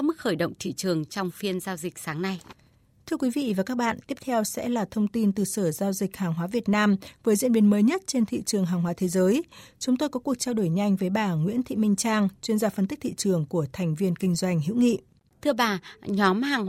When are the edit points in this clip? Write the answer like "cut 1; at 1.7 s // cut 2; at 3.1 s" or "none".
none